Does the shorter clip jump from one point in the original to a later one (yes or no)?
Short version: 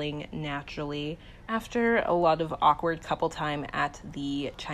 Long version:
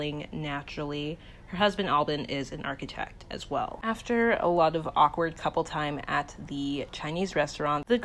yes